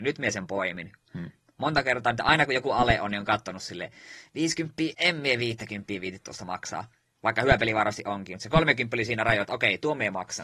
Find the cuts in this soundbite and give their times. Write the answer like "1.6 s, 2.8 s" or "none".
4.9 s